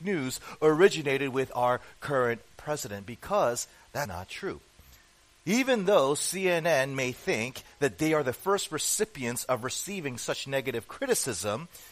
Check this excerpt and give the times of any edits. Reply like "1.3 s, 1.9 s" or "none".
4.1 s